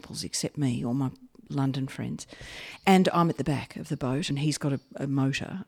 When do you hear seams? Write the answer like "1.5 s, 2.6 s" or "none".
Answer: 4.3 s

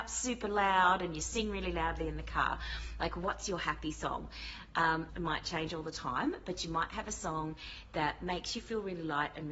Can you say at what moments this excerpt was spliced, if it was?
5.1 s

